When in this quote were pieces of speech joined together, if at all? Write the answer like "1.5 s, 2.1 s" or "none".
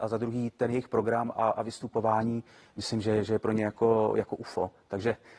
none